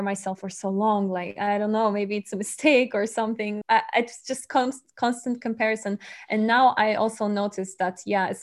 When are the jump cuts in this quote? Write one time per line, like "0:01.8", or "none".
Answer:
0:03.6